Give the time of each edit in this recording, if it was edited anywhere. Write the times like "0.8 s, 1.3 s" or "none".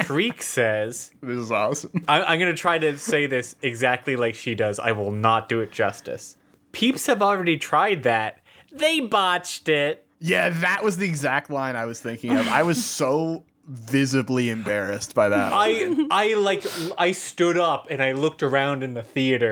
none